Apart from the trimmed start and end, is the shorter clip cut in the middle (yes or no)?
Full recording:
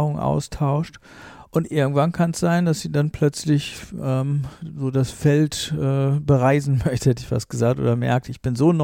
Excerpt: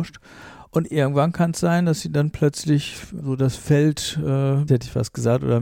yes